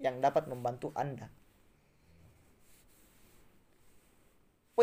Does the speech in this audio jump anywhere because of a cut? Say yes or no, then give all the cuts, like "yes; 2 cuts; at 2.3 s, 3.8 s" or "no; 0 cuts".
no; 0 cuts